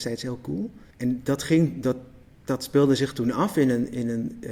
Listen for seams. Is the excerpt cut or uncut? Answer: cut